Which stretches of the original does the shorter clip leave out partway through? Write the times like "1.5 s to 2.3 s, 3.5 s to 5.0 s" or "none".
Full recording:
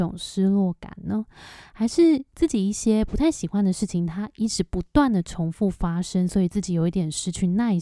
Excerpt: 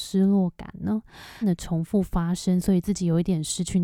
1.6 s to 5.1 s